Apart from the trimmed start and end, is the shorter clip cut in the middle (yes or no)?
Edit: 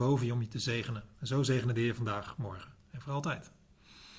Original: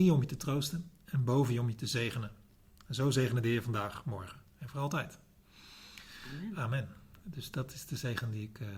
yes